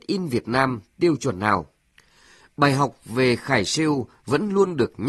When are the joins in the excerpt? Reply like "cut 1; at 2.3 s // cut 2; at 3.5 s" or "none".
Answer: none